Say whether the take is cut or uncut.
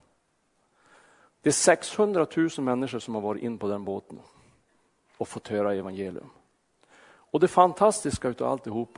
cut